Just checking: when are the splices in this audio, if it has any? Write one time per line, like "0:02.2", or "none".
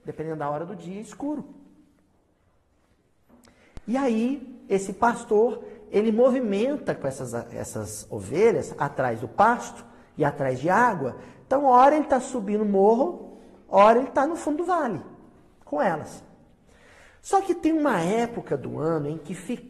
none